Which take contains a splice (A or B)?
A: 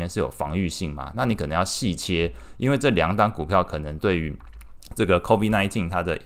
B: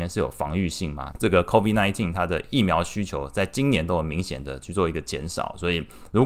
B